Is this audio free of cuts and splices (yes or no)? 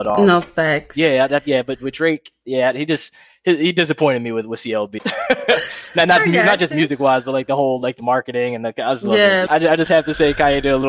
no